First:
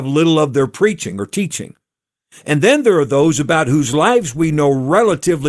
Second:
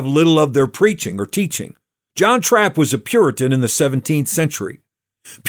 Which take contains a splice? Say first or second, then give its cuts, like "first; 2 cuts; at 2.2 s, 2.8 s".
second; 1 cut; at 2.1 s